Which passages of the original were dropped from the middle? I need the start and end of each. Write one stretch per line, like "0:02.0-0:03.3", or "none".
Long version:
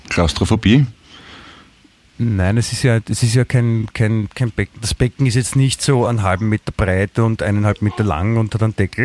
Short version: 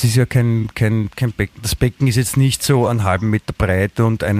none